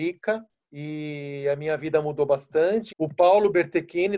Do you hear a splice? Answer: yes; 1 cut; at 2.9 s

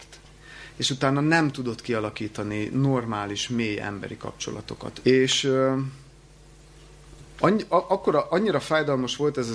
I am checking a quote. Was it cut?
yes; 1 cut; at 5.0 s

